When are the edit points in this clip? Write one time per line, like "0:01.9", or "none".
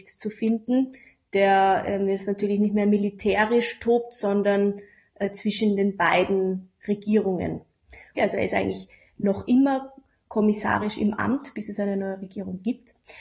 0:08.2